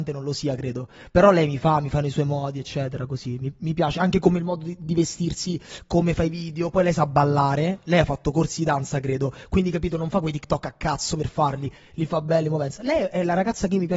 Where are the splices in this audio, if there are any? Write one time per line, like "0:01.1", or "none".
none